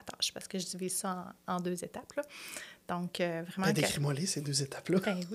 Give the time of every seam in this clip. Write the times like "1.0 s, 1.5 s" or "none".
none